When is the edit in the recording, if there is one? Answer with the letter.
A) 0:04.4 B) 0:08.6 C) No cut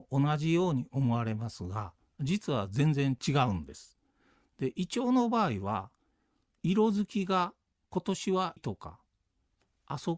B